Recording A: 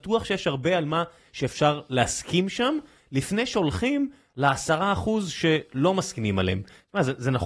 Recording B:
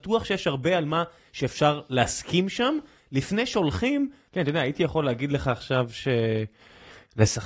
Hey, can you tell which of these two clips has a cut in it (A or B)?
B